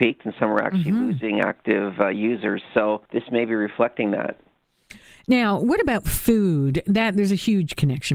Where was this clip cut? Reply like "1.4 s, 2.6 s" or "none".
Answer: 3.1 s